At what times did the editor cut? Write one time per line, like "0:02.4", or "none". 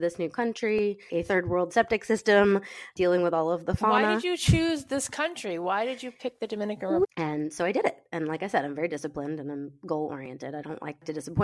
0:01.1
0:07.0